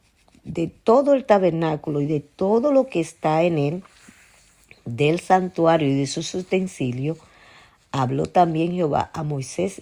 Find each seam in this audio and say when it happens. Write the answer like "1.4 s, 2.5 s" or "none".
none